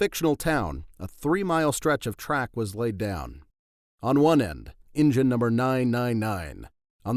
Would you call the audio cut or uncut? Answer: cut